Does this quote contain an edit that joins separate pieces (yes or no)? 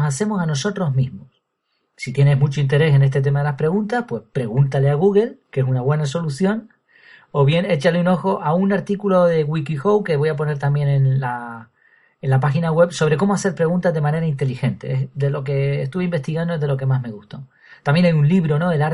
no